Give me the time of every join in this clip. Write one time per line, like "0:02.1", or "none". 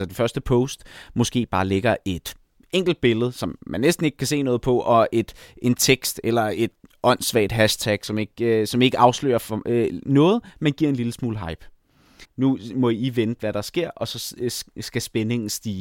0:12.2